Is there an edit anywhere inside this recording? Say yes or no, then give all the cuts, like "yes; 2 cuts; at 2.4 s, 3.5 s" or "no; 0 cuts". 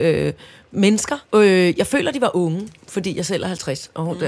yes; 1 cut; at 1.2 s